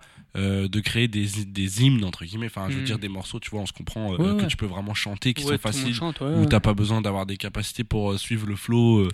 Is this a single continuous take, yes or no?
no